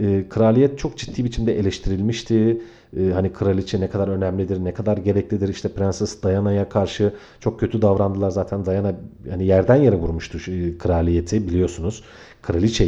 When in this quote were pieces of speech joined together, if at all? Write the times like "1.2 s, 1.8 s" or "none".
none

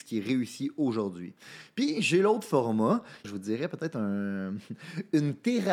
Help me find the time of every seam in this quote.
3.2 s

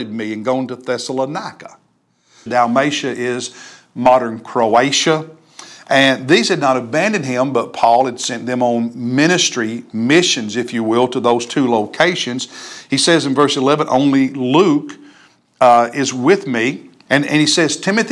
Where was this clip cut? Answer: 2.5 s, 17.1 s

